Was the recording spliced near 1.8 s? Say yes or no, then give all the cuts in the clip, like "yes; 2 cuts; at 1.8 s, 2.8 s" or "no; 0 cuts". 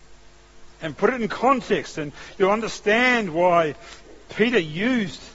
no; 1 cut; at 4.2 s